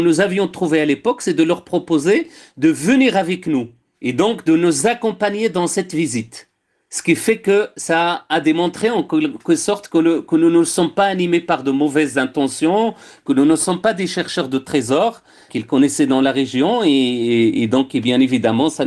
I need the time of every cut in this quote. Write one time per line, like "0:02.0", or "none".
none